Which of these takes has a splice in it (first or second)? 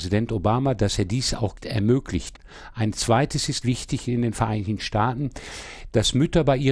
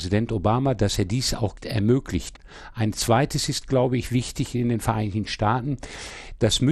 first